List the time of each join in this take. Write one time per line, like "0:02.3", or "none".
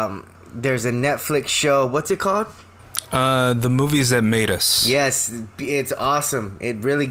none